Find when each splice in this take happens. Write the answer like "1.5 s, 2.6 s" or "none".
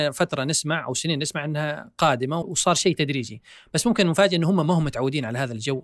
2.4 s